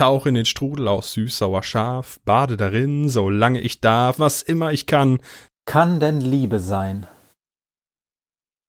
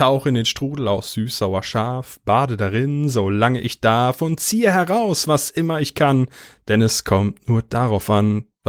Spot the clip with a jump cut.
first; 2 cuts; at 4.2 s, 5.5 s

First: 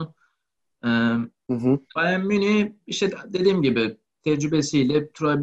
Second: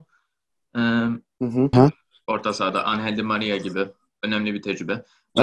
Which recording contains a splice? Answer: second; 1 cut; at 1.7 s

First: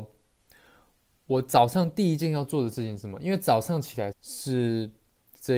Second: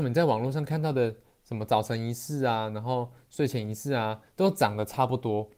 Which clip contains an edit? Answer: first; 1 cut; at 4.1 s

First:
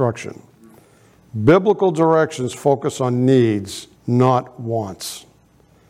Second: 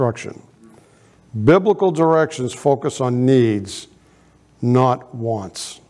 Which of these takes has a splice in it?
first; 1 cut; at 4.0 s

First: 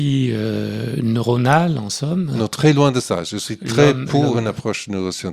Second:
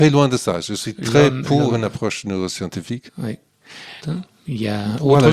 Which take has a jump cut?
second; 1 cut; at 4.0 s

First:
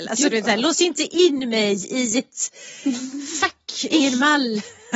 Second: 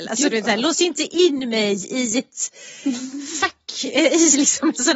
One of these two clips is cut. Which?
first; 1 cut; at 3.9 s

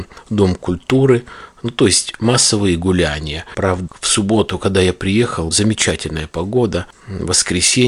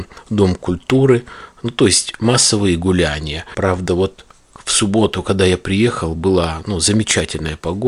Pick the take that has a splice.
first; 2 cuts; at 3.9 s, 5.5 s

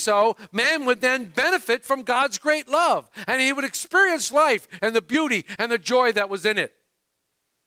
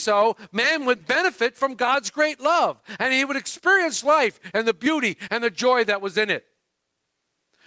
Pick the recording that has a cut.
second; 1 cut; at 1.0 s

